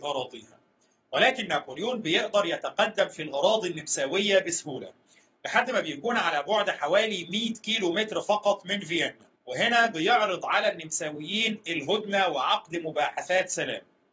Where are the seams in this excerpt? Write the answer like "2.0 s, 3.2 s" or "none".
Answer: 9.3 s